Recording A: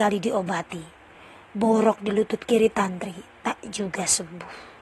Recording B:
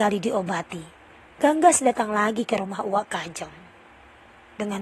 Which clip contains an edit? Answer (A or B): B